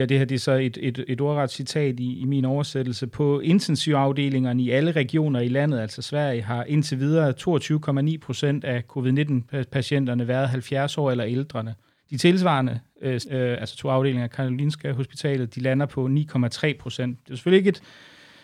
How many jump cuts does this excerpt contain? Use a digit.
2